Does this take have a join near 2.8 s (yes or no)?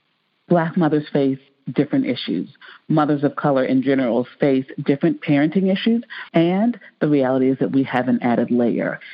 no